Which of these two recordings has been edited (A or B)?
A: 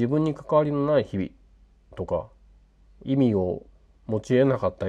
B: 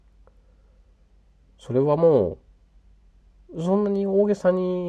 A